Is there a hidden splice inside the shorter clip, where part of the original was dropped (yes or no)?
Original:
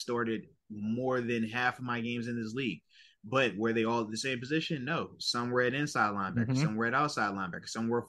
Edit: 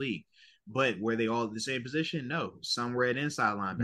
no